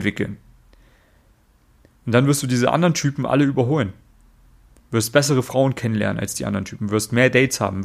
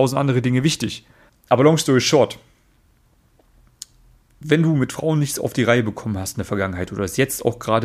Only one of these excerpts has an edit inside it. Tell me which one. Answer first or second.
second